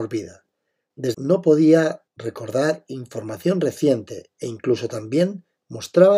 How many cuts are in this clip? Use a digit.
1